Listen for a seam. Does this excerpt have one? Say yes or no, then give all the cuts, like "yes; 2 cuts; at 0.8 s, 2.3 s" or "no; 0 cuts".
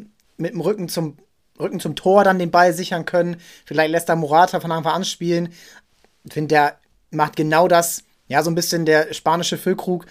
no; 0 cuts